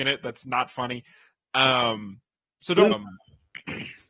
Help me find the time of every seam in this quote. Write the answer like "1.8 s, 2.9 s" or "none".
2.9 s